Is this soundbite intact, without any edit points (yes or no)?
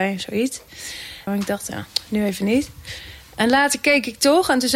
no